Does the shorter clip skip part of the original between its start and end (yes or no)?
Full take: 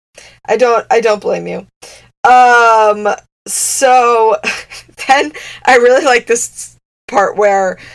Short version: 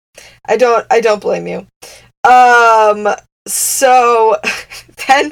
no